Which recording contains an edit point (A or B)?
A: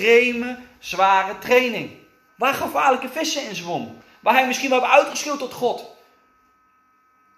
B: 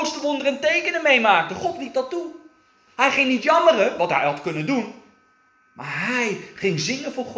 A